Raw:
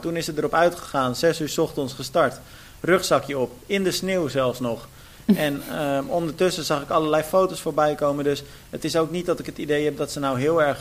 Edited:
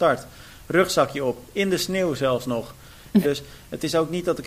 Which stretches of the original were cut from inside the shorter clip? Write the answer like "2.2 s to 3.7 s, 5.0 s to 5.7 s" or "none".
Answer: 5.4 s to 8.2 s